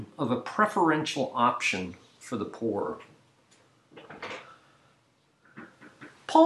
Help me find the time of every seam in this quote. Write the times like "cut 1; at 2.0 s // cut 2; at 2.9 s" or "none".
none